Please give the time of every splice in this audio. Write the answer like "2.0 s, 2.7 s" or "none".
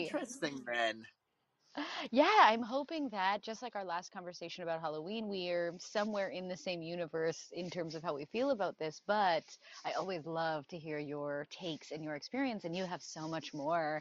none

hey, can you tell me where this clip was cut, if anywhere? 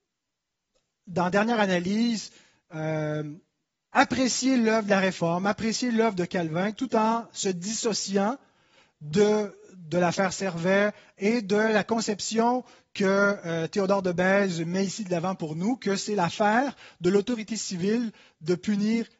none

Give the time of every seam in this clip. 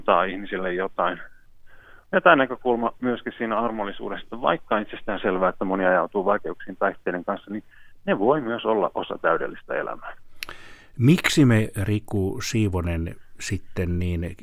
none

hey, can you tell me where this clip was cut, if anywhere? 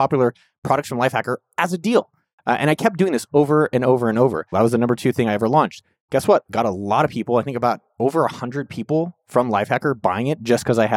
4.5 s, 6.5 s

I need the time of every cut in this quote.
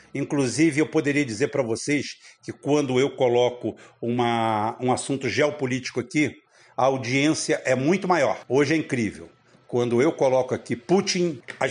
none

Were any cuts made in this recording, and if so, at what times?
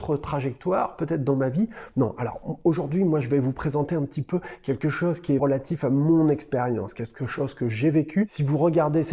1.9 s, 5.4 s

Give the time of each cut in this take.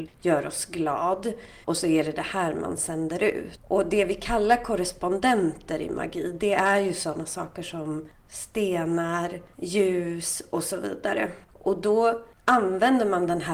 1.6 s, 9.5 s, 11.4 s

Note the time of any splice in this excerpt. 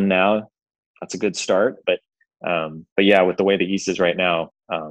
1.8 s

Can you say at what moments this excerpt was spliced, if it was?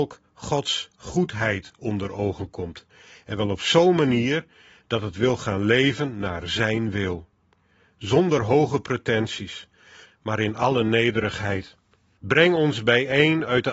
10.0 s, 12.2 s

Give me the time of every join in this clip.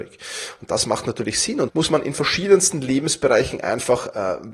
1.7 s

